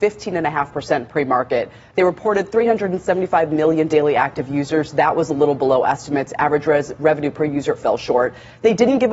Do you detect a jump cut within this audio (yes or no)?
yes